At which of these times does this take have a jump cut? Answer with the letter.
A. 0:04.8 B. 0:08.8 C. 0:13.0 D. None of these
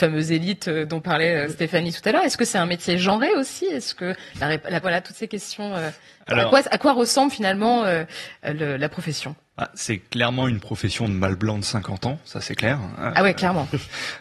A